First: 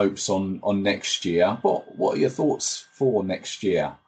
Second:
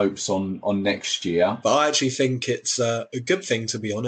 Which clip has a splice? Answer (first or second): second